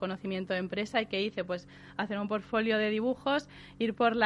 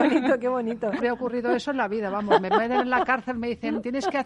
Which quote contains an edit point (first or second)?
second